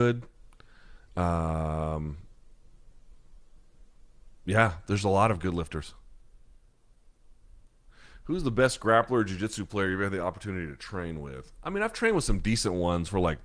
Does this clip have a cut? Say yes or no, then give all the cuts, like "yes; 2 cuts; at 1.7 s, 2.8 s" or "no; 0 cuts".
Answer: no; 0 cuts